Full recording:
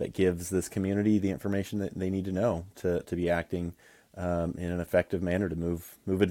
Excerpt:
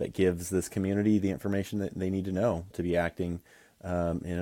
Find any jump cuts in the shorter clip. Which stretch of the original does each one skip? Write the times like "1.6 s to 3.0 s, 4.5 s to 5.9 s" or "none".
2.7 s to 3.0 s